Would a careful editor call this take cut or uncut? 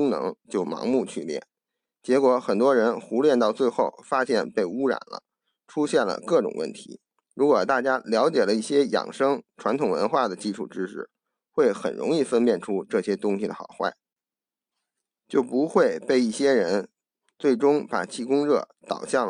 cut